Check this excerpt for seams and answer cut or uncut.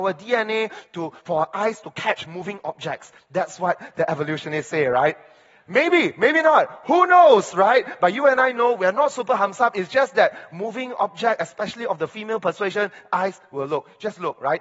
uncut